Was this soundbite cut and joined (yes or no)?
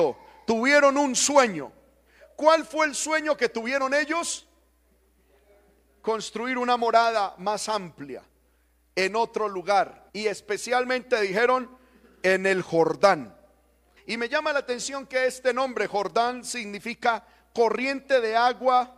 yes